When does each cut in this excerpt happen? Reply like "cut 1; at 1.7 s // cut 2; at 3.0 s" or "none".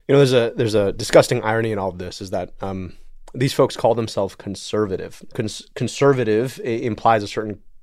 cut 1; at 5.3 s